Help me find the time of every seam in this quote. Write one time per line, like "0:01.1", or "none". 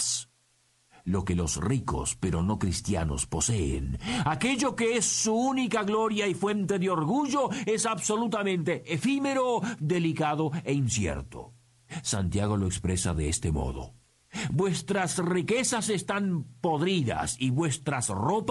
0:09.8